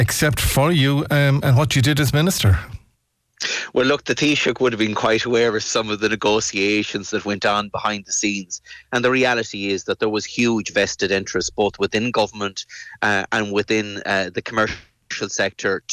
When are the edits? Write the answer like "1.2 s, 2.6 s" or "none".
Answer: none

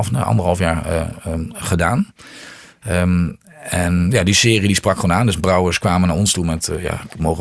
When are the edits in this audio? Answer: none

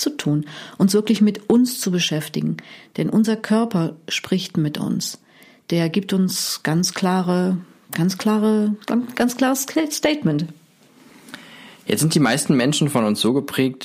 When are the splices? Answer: none

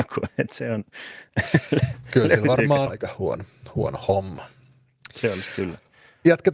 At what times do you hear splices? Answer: 2.9 s

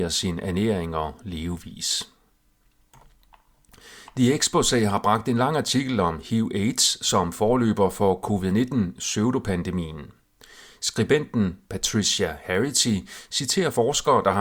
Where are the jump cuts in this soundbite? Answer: none

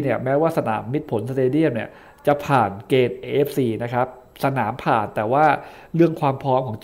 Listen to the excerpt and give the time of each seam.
none

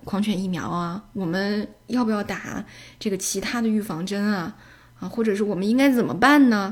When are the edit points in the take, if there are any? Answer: none

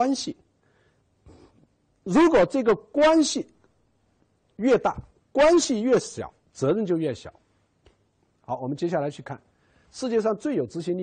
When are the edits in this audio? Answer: 5.2 s

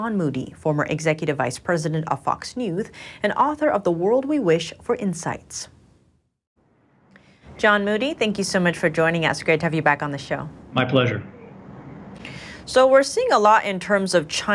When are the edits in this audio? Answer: 10.6 s

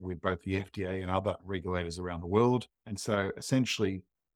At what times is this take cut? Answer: 2.7 s

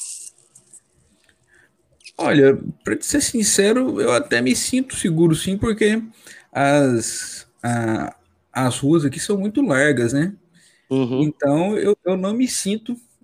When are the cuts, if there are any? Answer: none

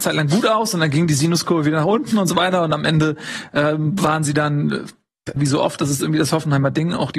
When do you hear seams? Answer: 5.4 s

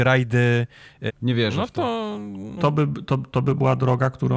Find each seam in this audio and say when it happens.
1.1 s, 2.6 s

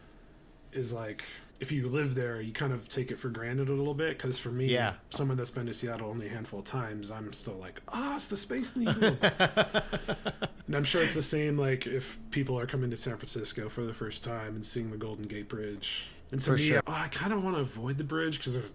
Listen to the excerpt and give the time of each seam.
1.5 s, 16.8 s

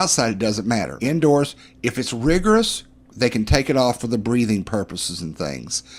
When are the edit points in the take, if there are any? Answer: 1.0 s, 4.0 s

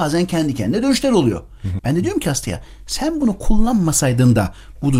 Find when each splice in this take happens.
1.8 s

